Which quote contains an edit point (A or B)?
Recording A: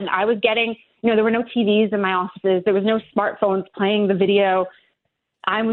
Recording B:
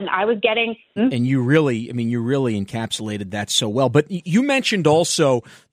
B